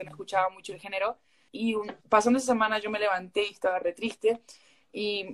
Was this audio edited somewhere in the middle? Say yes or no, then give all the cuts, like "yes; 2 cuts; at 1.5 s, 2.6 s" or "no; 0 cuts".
yes; 1 cut; at 1.5 s